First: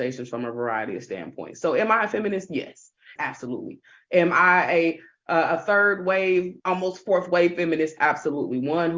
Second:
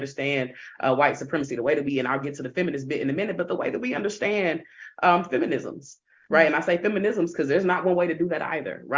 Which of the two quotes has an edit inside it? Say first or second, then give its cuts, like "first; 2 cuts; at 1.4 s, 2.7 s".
first; 2 cuts; at 3.2 s, 6.6 s